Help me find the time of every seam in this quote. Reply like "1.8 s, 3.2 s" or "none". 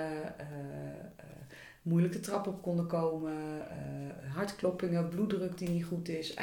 none